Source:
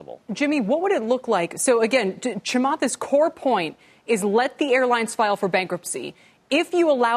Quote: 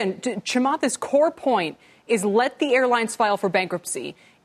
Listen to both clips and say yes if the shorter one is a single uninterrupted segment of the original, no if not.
yes